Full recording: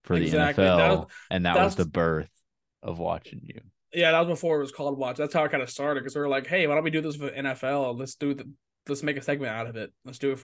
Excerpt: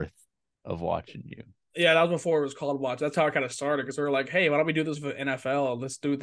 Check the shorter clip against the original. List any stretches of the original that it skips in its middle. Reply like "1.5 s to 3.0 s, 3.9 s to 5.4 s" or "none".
none